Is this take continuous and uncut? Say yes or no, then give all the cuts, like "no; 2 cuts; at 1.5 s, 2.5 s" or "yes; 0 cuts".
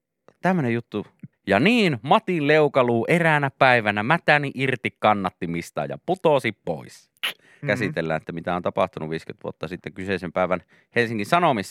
no; 2 cuts; at 1.3 s, 7.6 s